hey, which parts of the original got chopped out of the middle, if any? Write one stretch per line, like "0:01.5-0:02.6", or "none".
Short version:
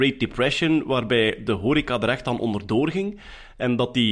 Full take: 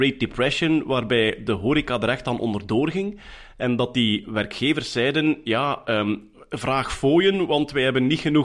none